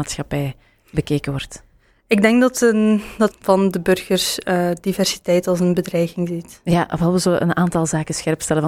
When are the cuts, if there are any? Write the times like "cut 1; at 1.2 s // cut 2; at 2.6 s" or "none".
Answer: cut 1; at 3.3 s

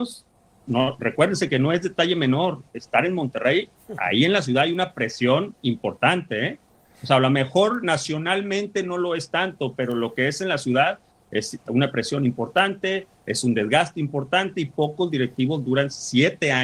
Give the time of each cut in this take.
none

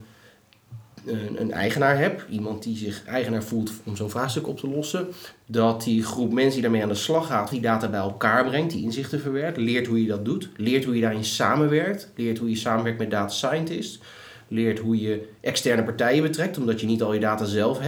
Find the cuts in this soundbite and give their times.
cut 1; at 7.5 s

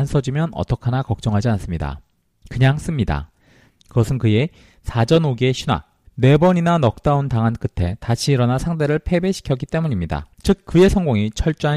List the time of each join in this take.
cut 1; at 3.7 s // cut 2; at 6.0 s // cut 3; at 10.3 s

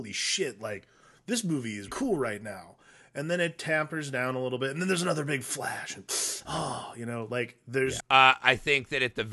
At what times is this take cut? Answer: cut 1; at 1.9 s // cut 2; at 8.0 s

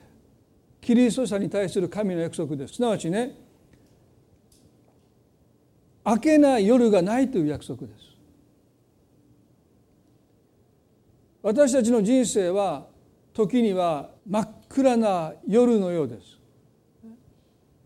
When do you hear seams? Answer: cut 1; at 2.7 s // cut 2; at 14.2 s

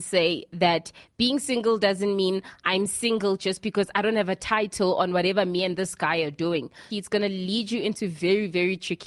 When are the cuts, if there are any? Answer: cut 1; at 6.9 s

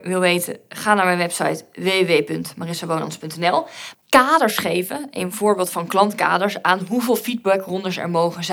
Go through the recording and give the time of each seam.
cut 1; at 3.9 s

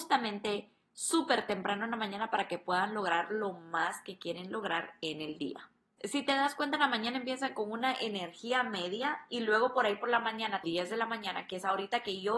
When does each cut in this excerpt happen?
cut 1; at 6.0 s // cut 2; at 10.6 s

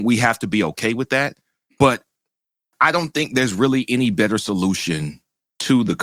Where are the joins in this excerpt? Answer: cut 1; at 1.7 s

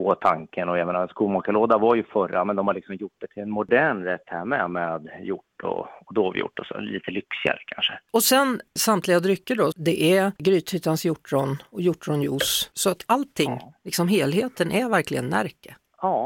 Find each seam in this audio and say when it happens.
cut 1; at 9.7 s

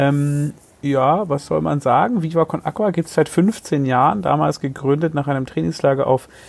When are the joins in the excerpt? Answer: none

